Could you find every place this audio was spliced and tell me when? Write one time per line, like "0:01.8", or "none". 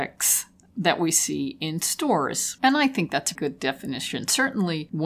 0:03.4